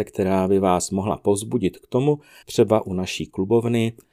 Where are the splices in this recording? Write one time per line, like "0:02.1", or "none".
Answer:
0:02.4